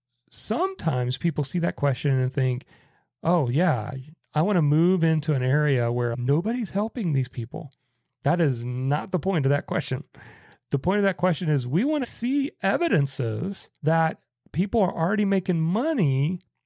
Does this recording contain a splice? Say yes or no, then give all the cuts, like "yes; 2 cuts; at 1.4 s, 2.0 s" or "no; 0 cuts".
yes; 2 cuts; at 12.0 s, 13.8 s